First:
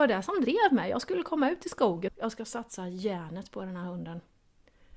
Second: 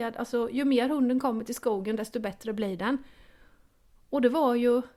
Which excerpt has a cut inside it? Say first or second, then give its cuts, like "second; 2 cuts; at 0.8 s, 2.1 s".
first; 1 cut; at 2.1 s